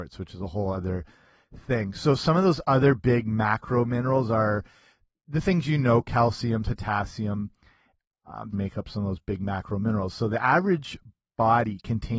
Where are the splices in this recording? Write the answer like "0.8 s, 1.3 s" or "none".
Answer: 6.7 s, 8.5 s